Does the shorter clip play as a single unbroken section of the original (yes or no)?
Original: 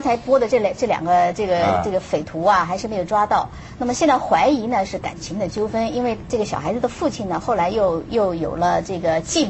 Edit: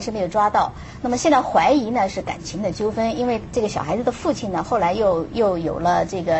yes